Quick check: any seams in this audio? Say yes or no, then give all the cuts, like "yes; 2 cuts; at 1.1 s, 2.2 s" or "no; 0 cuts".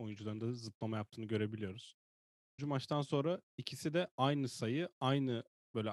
yes; 1 cut; at 2.6 s